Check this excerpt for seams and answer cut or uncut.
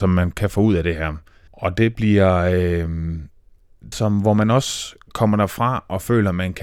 cut